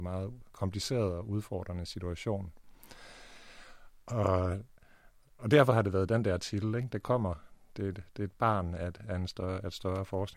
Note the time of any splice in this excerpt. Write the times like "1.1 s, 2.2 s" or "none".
none